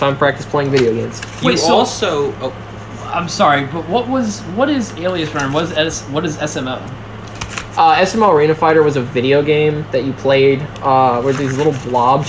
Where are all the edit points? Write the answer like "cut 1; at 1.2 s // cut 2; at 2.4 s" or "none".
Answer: none